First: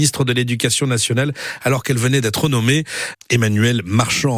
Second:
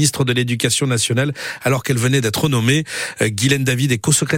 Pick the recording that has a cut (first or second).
first